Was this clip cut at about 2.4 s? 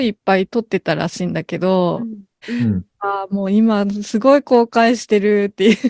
yes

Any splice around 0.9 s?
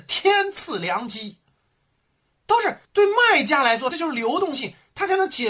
no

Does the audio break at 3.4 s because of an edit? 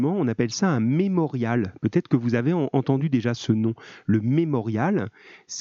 yes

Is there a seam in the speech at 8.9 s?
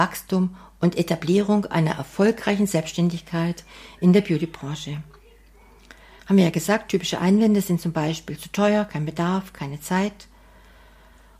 no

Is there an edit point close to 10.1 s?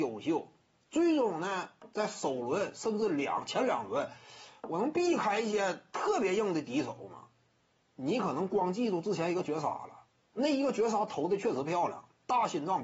no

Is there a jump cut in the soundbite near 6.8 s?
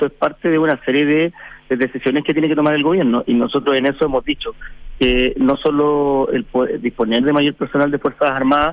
no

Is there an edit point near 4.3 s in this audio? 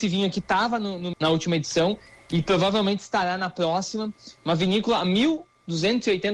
no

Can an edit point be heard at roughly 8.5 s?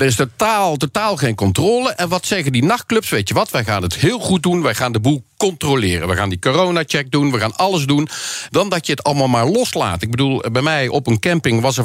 yes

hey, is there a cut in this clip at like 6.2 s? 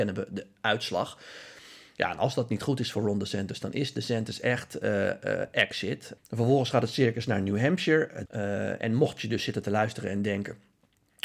yes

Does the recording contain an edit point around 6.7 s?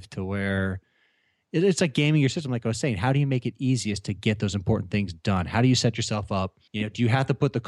yes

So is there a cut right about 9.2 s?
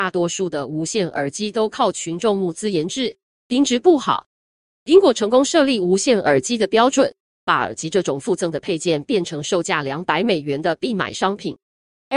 no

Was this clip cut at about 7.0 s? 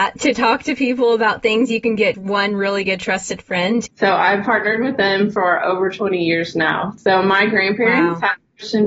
no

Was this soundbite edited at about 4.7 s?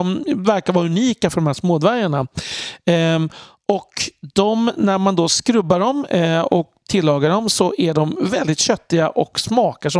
no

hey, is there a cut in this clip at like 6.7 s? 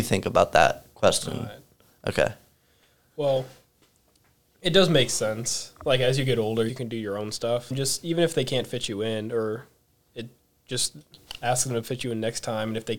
yes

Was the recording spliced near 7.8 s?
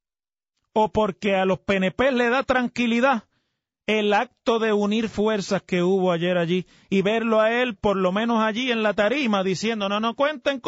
yes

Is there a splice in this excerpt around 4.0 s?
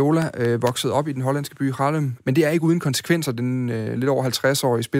yes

